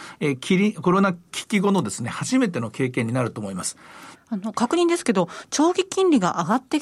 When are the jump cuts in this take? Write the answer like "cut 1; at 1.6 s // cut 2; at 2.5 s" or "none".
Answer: cut 1; at 4.1 s